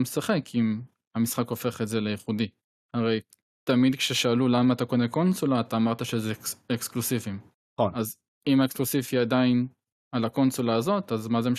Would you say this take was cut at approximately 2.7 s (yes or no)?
no